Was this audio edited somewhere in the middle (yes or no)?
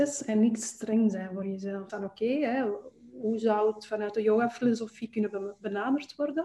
yes